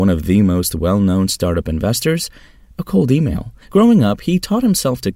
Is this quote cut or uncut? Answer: cut